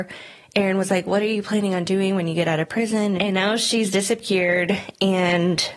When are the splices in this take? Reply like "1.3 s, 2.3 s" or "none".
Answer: 3.2 s

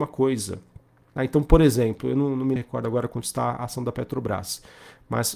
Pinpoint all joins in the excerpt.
1.2 s, 2.6 s

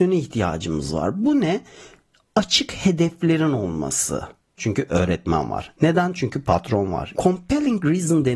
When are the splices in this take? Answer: 4.6 s, 7.1 s

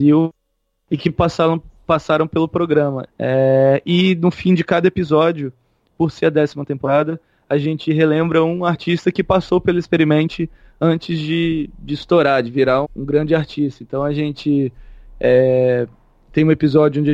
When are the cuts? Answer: 3.1 s, 12.8 s

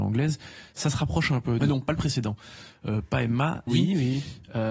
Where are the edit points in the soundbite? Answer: 1.6 s, 3.7 s

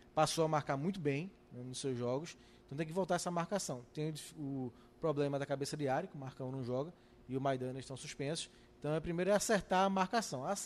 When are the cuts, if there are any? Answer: none

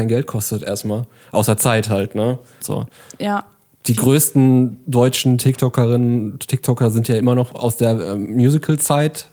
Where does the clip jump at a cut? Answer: 2.6 s

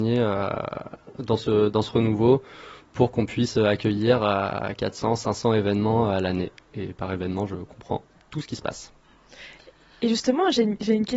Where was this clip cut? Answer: none

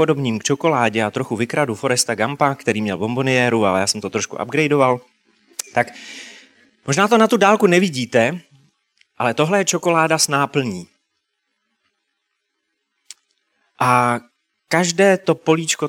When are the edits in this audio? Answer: none

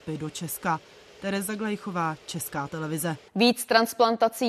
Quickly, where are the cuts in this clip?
3.3 s

